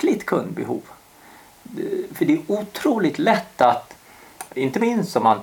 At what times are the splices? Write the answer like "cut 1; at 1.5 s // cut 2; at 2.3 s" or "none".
cut 1; at 4.5 s